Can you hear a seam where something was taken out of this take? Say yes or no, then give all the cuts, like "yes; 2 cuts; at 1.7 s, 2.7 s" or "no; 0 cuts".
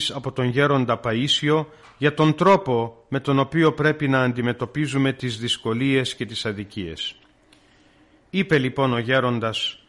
no; 0 cuts